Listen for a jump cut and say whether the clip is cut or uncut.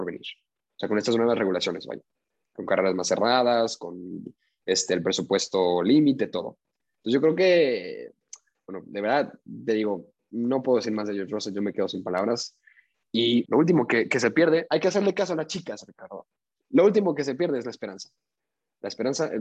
cut